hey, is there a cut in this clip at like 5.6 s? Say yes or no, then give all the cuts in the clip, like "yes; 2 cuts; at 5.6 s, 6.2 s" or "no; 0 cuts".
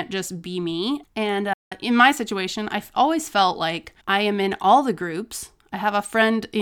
no; 2 cuts; at 1.0 s, 4.0 s